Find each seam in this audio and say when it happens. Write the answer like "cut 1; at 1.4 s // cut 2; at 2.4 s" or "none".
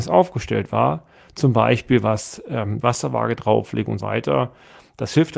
cut 1; at 2.8 s // cut 2; at 4.0 s